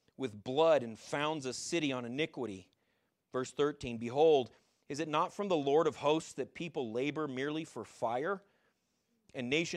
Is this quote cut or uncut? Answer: cut